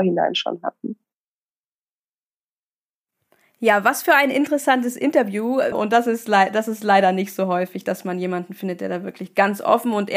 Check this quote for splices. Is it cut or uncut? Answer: cut